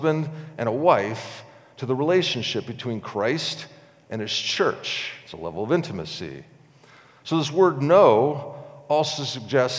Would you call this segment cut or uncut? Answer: uncut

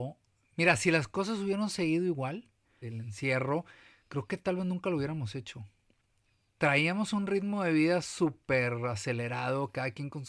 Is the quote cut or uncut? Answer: cut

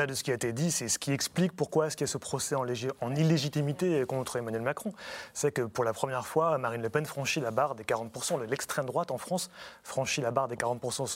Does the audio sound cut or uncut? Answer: uncut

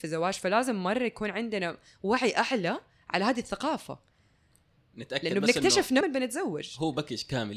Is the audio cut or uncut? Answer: cut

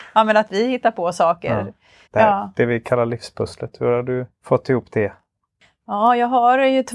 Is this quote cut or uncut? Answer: cut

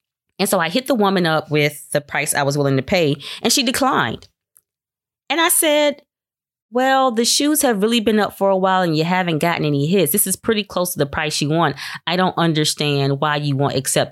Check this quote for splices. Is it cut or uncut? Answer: uncut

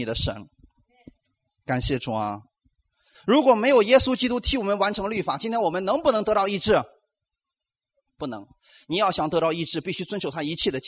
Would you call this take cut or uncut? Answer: cut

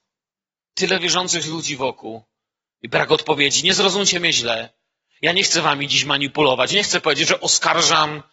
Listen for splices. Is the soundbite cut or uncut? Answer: uncut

